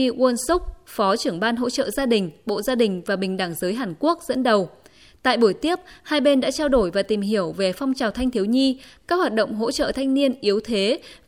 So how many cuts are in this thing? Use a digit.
0